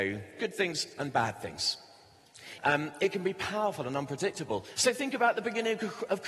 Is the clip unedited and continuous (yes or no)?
no